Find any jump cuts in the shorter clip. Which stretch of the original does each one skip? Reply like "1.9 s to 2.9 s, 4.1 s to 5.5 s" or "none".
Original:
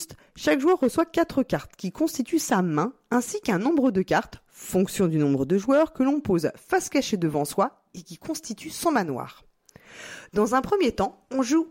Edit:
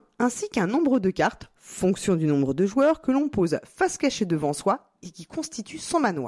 none